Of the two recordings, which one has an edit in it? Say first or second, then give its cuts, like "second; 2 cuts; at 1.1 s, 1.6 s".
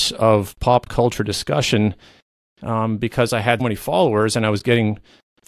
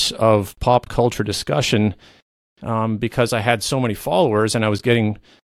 first; 1 cut; at 3.6 s